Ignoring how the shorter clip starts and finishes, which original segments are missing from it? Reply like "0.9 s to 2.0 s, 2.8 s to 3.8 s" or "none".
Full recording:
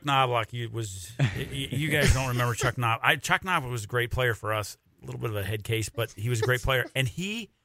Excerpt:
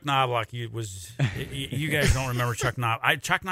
none